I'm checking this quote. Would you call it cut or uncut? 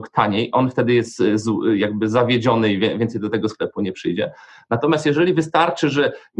uncut